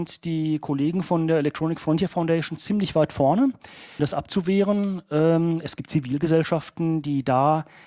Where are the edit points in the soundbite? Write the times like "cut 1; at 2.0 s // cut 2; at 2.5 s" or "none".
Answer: cut 1; at 4.0 s